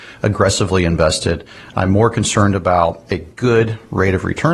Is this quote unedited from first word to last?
yes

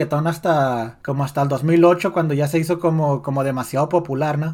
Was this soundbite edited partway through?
yes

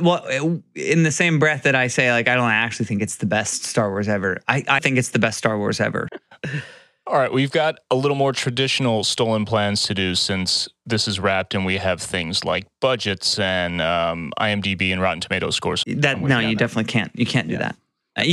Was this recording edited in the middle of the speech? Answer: yes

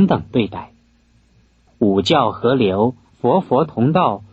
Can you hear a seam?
yes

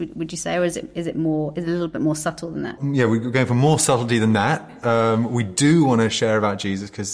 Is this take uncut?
no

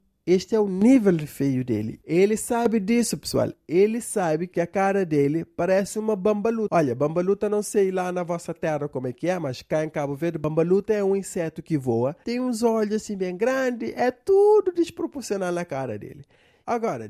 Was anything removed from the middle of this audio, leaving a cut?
no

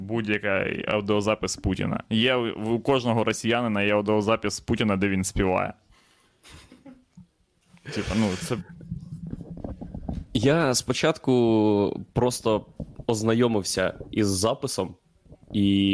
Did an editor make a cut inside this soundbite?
no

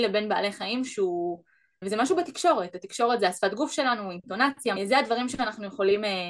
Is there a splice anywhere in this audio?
yes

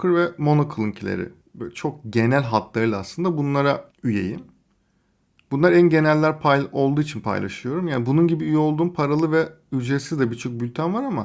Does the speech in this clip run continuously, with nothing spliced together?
yes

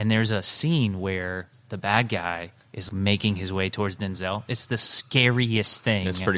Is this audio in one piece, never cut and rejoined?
no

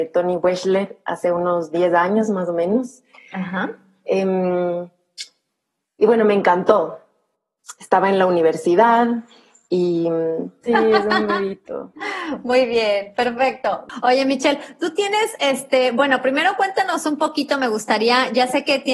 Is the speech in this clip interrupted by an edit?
yes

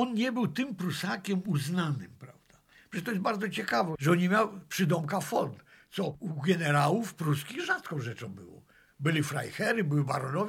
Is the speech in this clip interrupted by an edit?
no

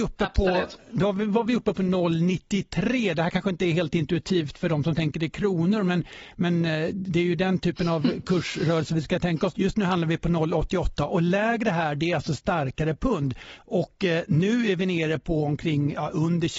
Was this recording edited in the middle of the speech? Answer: yes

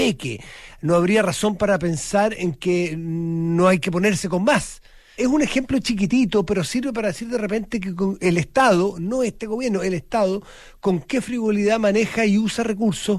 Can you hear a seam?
yes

